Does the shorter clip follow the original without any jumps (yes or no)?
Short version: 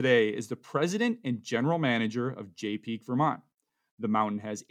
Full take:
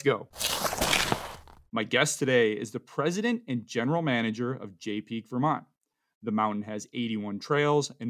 yes